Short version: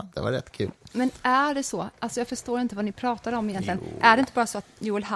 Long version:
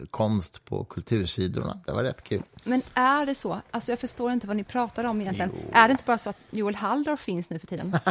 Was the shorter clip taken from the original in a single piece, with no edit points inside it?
yes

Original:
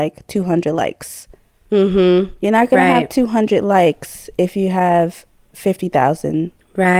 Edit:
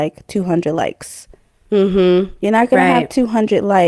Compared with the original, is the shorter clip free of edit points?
yes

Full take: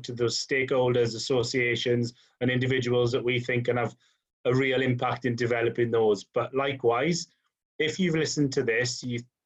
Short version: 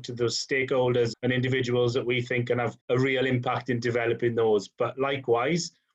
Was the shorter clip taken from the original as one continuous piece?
no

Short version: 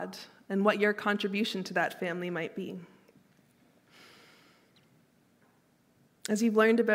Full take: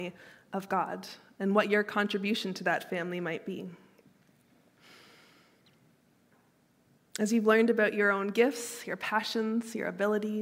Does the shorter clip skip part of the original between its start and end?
no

